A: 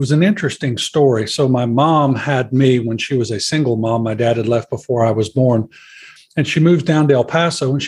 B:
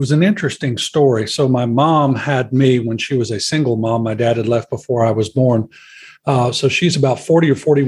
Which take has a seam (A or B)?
A